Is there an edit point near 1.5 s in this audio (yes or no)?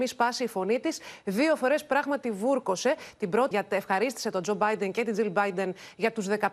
no